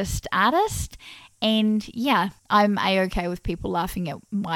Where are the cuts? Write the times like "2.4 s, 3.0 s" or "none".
2.4 s